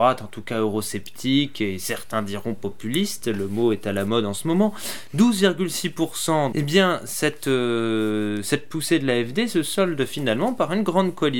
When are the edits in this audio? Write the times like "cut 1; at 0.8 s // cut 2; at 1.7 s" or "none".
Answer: cut 1; at 6.5 s